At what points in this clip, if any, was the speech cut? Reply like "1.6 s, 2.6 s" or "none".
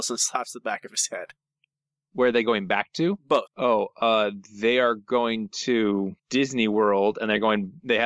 3.5 s, 6.2 s